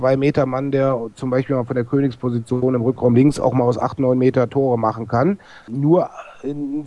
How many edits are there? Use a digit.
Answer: 1